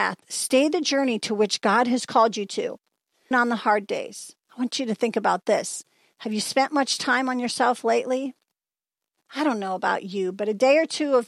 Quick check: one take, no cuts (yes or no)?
no